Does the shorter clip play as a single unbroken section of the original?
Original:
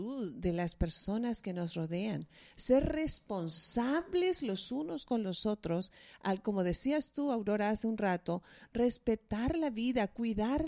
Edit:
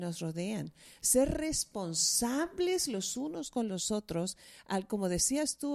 yes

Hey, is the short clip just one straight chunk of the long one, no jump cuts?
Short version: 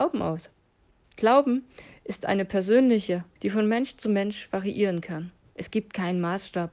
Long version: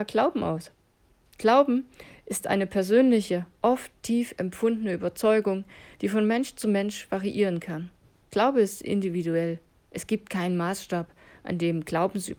no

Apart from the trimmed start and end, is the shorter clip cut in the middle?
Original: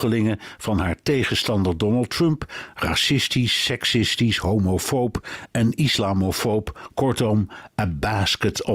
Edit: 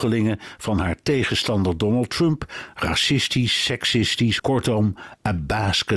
yes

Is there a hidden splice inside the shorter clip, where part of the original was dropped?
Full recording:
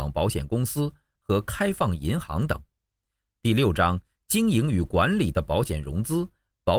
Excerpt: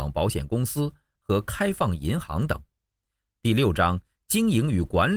no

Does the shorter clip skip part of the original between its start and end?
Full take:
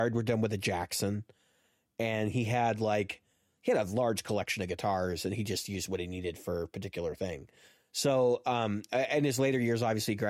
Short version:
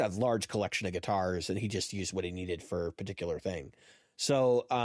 no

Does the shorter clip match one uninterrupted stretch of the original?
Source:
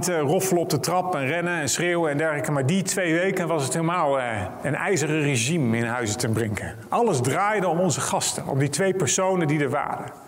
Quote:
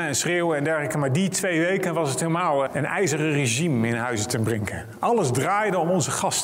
no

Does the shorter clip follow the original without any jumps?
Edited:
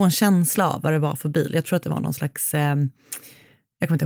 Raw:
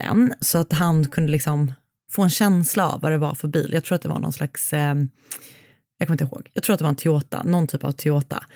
yes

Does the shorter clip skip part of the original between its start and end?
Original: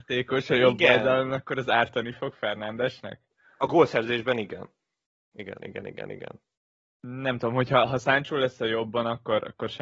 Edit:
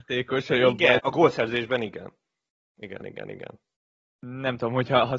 yes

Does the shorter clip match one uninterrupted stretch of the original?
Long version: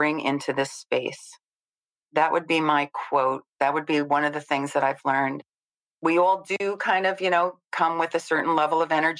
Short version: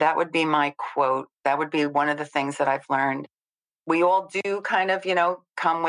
yes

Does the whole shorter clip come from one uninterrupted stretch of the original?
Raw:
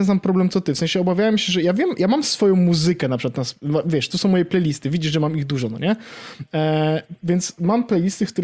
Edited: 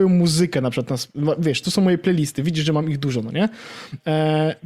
yes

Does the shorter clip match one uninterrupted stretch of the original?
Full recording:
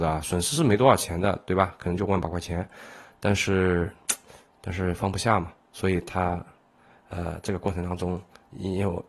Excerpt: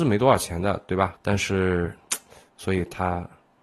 no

